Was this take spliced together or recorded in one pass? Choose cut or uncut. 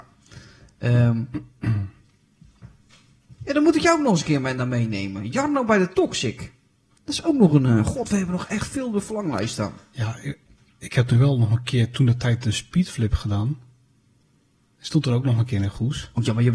uncut